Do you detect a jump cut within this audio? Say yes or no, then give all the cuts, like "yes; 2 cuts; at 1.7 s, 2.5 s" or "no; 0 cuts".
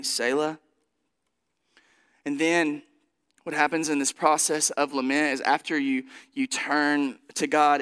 no; 0 cuts